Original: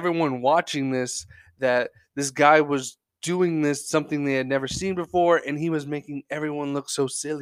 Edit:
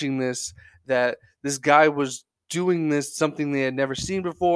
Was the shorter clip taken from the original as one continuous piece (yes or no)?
yes